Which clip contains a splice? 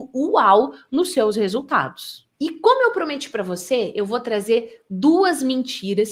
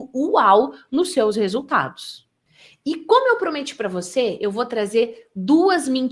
first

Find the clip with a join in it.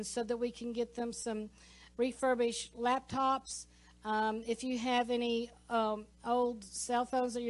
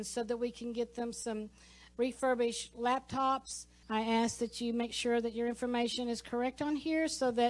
second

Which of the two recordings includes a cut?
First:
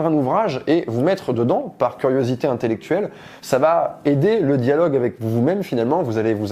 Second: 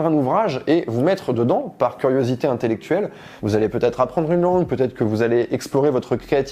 second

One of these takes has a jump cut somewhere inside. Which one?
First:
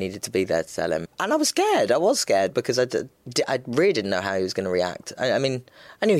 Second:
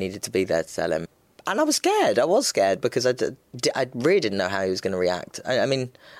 first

